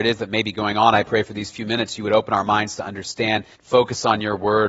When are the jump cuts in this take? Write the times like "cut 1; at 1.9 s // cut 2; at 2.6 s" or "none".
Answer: cut 1; at 3.5 s